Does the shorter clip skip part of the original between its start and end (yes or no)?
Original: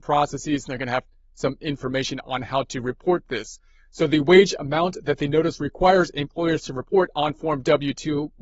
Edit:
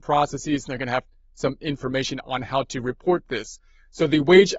no